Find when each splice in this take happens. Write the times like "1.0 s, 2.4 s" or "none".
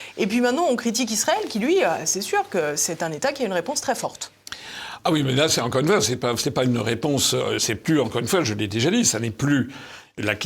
none